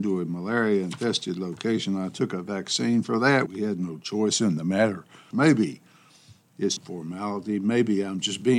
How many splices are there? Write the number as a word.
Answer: three